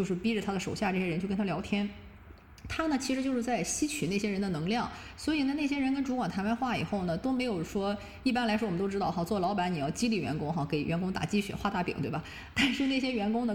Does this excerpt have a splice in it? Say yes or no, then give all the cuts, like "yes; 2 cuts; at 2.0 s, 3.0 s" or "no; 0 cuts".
no; 0 cuts